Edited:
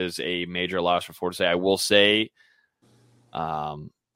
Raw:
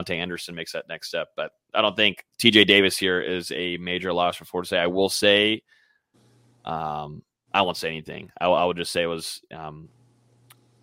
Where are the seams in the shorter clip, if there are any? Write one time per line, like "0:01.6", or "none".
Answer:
none